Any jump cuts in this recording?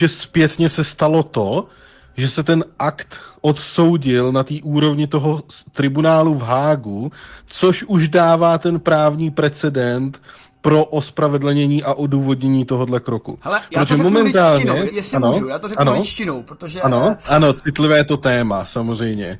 yes; 2 cuts; at 14.9 s, 17.2 s

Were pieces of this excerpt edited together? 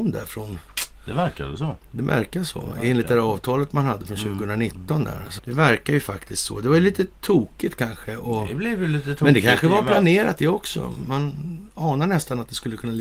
yes; 1 cut; at 5.4 s

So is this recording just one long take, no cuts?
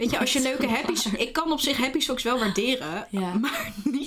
yes; 0 cuts

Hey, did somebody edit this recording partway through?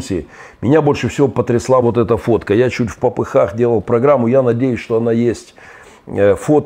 no; 0 cuts

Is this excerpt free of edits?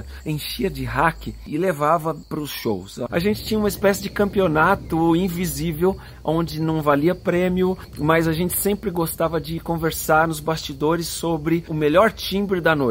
no; 1 cut; at 3.1 s

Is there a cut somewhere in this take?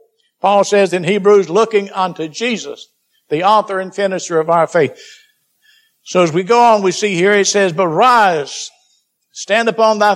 no; 0 cuts

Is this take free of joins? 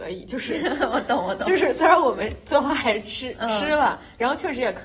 yes; 0 cuts

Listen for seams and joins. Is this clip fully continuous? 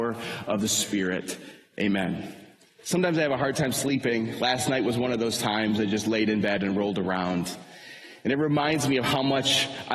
yes; 0 cuts

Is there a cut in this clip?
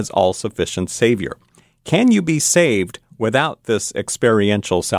no; 0 cuts

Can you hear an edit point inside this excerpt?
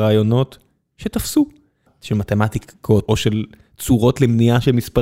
yes; 2 cuts; at 1.9 s, 3.1 s

